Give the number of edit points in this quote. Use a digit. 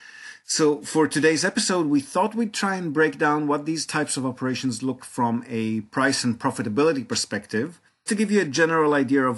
2